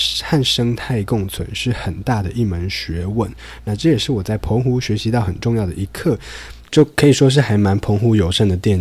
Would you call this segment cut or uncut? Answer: cut